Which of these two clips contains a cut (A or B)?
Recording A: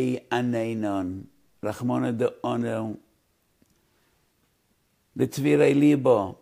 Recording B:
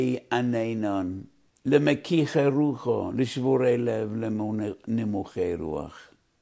B